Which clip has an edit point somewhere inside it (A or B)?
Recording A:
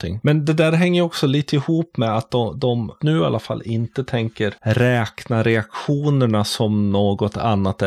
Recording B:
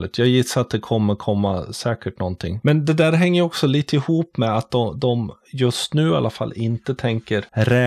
A